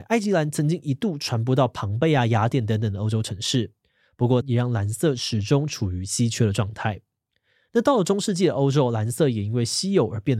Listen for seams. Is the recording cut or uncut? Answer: cut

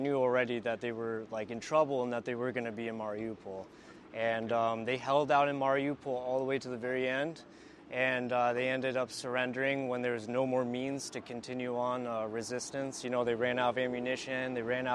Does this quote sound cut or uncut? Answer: uncut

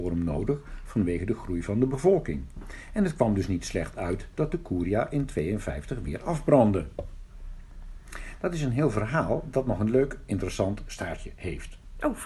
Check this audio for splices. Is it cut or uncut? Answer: uncut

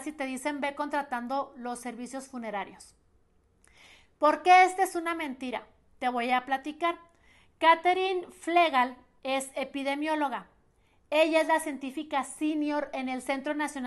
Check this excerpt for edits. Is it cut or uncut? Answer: uncut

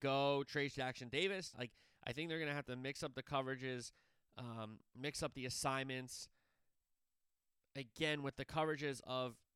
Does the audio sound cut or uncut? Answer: cut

